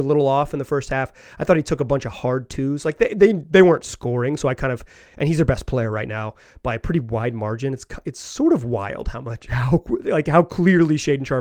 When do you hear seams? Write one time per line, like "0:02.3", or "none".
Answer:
none